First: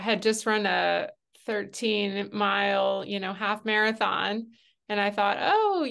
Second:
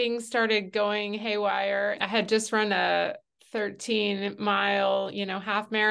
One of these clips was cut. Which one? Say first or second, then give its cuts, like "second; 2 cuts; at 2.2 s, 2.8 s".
second; 1 cut; at 2.0 s